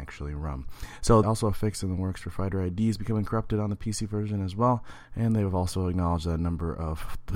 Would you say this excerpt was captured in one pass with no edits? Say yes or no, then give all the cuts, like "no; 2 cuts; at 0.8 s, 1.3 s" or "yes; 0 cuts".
no; 1 cut; at 1.2 s